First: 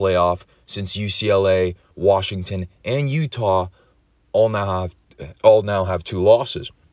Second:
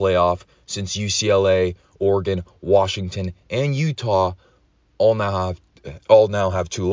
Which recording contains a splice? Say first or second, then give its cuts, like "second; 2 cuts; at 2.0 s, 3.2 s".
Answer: first; 1 cut; at 1.9 s